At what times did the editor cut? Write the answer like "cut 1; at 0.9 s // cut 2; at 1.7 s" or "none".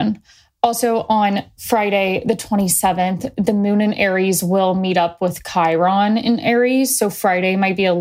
none